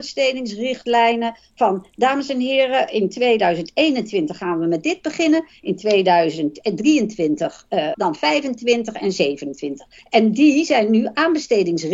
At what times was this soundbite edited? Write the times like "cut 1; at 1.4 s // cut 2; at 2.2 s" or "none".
cut 1; at 7.9 s // cut 2; at 10.0 s